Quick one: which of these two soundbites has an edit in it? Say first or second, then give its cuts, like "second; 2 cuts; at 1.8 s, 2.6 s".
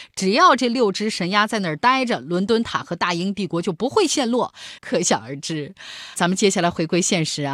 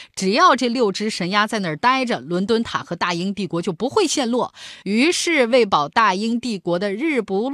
first; 2 cuts; at 4.8 s, 6.2 s